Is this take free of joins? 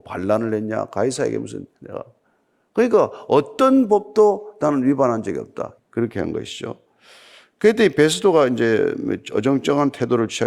no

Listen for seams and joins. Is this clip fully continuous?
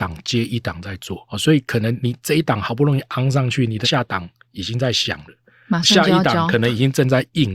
no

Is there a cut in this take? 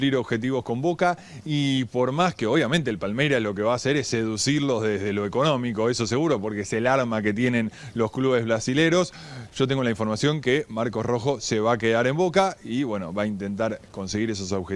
no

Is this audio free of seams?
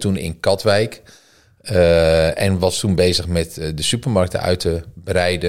yes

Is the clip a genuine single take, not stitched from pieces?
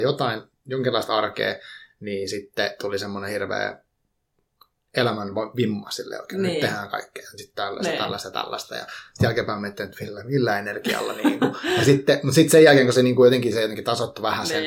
yes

